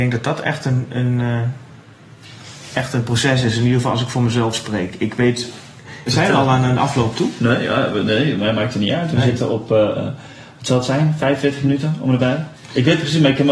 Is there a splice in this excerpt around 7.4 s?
no; 2 cuts; at 6.0 s, 9.9 s

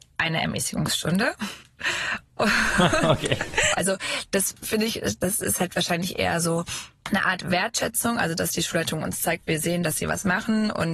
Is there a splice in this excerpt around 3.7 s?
yes; 1 cut; at 3.7 s

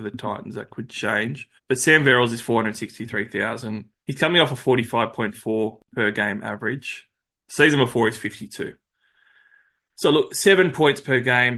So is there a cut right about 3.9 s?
yes; 2 cuts; at 1.6 s, 3.9 s

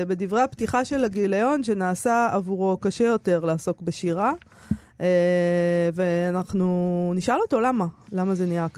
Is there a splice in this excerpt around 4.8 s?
no; 0 cuts

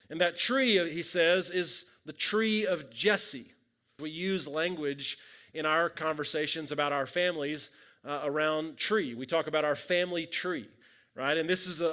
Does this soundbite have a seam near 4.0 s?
yes; 1 cut; at 4.0 s

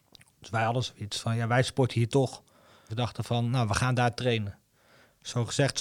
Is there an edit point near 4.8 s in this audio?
no; 1 cut; at 2.9 s

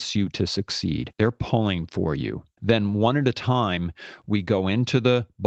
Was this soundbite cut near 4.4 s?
no; 2 cuts; at 1.1 s, 2.6 s

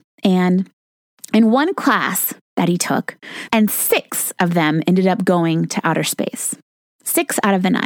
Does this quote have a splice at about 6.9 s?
no; 1 cut; at 3.5 s

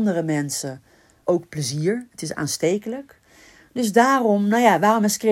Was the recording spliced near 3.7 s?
no; 1 cut; at 1.2 s

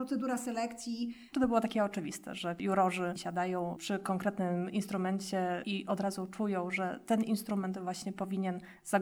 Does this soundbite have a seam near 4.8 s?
no; 1 cut; at 1.3 s

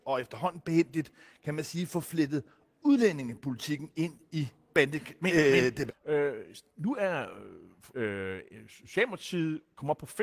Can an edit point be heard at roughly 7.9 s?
yes; 2 cuts; at 5.9 s, 7.9 s

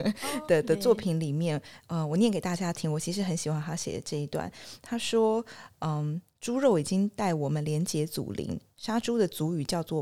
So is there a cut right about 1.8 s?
no; 0 cuts

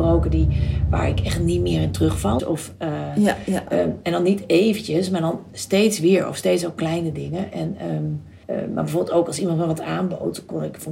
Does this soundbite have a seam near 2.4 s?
yes; 2 cuts; at 2.4 s, 8.4 s

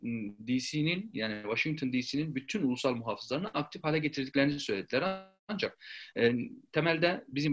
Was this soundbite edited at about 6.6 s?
no; 1 cut; at 5.4 s

